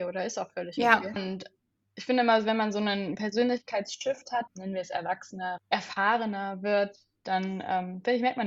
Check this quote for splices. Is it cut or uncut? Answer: cut